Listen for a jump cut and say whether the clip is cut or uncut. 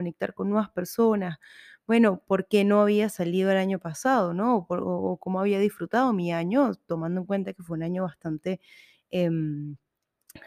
uncut